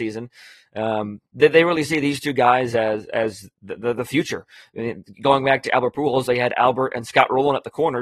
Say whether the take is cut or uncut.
uncut